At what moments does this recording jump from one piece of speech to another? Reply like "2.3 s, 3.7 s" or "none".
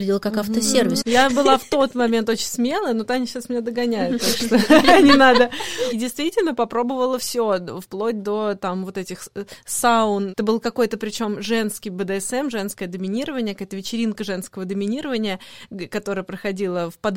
1.0 s